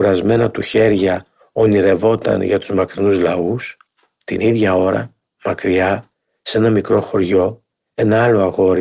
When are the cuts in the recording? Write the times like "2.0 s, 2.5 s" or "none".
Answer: none